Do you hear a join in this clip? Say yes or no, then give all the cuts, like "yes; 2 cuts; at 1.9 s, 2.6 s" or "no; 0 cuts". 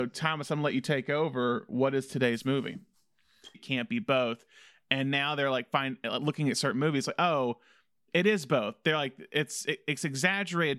yes; 1 cut; at 3.5 s